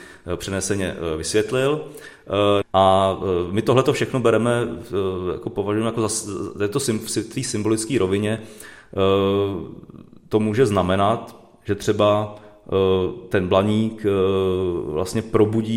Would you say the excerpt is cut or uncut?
cut